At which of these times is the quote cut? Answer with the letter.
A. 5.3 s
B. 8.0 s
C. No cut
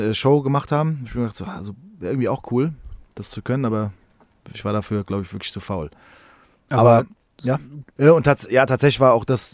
B